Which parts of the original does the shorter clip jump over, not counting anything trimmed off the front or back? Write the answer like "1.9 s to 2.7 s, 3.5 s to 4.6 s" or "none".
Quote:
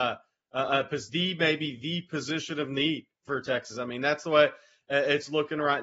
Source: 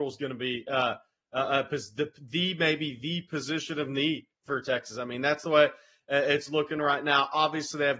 1.9 s to 2.3 s